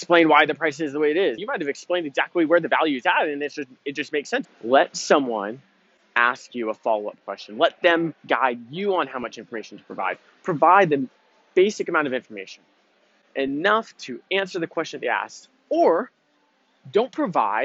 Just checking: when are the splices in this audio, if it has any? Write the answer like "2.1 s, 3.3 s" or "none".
1.4 s, 4.4 s